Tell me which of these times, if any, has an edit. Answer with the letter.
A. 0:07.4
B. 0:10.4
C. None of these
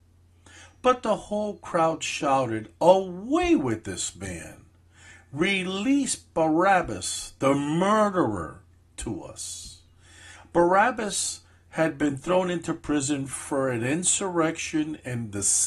C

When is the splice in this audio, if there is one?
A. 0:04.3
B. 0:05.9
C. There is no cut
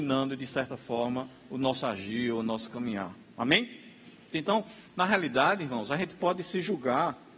A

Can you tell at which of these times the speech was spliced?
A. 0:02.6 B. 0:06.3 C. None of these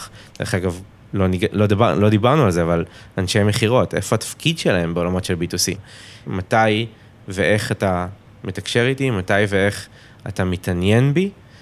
B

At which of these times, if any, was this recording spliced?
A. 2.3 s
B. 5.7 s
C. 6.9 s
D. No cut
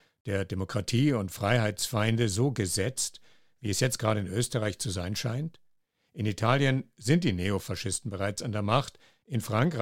D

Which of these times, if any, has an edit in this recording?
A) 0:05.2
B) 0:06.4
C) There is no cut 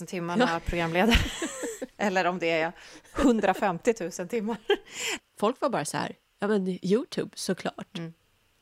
A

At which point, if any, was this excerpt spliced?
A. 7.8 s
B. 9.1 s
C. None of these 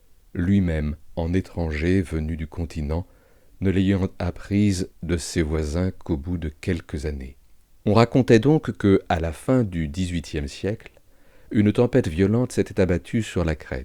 A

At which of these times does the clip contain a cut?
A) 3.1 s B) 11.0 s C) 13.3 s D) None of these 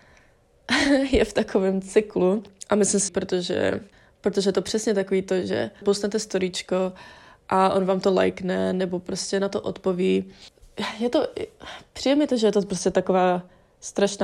A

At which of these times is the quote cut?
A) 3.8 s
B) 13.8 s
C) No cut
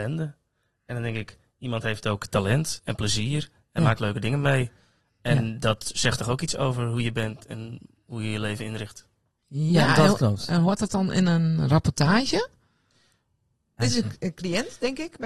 B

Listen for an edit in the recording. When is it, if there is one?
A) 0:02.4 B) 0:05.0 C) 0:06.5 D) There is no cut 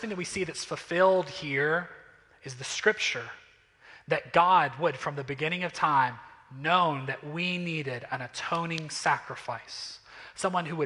D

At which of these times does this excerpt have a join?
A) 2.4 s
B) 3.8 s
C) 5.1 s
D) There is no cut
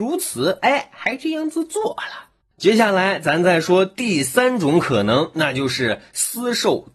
D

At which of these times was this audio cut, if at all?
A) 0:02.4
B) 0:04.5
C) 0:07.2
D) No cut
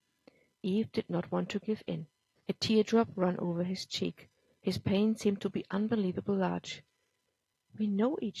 A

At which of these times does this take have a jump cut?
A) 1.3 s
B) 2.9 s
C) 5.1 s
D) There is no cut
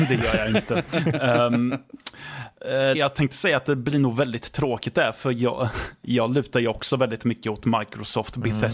B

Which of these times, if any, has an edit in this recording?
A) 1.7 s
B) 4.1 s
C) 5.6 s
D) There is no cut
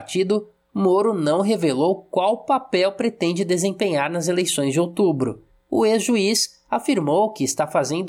D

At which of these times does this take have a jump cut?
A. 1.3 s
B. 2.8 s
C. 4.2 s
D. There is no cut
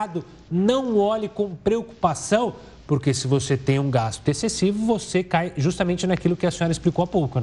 C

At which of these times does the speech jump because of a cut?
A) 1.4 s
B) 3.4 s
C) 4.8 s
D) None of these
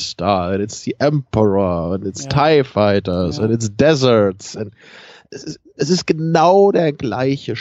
D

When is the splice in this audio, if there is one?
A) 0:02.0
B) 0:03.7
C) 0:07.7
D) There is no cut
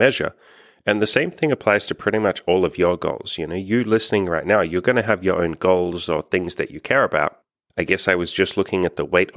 C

